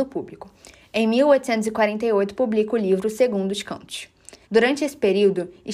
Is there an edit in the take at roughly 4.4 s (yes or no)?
yes